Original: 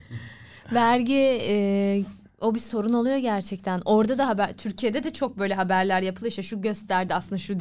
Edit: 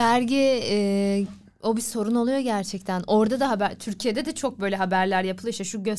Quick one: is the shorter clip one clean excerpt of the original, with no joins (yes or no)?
yes